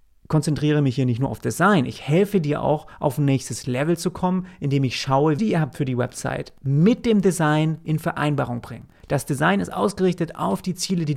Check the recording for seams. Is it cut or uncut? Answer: cut